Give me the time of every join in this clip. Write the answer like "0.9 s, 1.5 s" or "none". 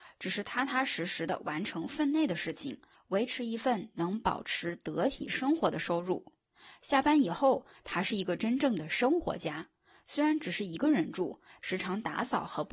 11.6 s